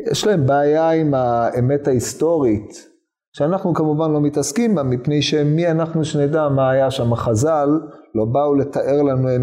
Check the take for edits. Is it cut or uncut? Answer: uncut